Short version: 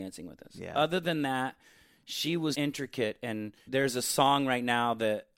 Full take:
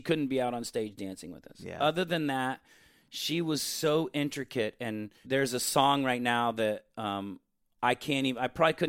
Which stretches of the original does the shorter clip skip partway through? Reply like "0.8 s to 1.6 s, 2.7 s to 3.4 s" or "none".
3.6 s to 4.1 s